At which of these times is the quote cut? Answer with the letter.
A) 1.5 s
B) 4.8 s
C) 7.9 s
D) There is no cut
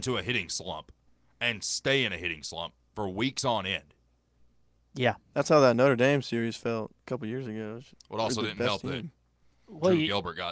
C